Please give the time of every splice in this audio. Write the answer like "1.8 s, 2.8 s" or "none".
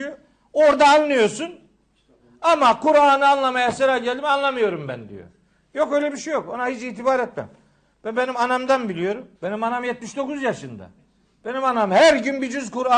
9.3 s